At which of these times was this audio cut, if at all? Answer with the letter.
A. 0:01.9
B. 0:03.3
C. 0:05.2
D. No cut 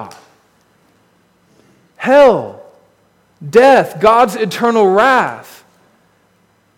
A